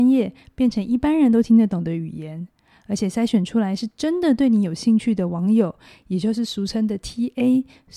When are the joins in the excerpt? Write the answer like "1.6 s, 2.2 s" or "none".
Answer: none